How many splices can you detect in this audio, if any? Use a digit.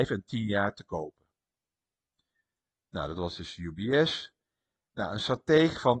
0